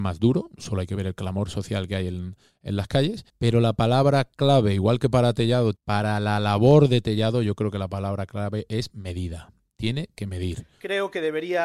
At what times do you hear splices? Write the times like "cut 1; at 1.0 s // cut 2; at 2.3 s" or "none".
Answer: cut 1; at 3.3 s // cut 2; at 5.7 s

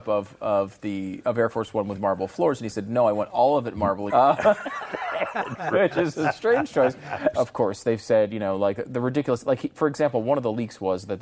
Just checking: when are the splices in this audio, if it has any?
cut 1; at 4.1 s // cut 2; at 7.3 s

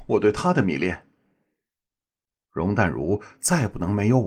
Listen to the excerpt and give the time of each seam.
none

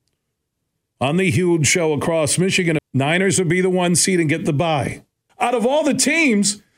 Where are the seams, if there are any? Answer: cut 1; at 2.8 s // cut 2; at 5.3 s

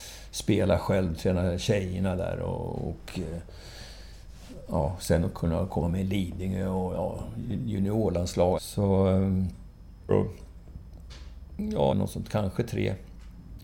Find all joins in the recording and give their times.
cut 1; at 8.5 s // cut 2; at 10.1 s // cut 3; at 11.9 s

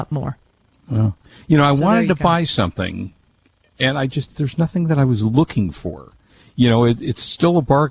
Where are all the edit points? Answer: none

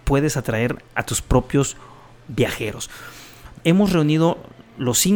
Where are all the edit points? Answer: cut 1; at 3.5 s

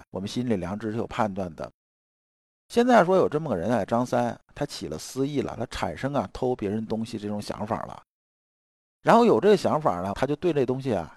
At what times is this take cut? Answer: none

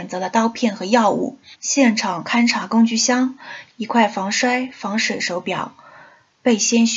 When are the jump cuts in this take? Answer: cut 1; at 1.5 s // cut 2; at 3.7 s

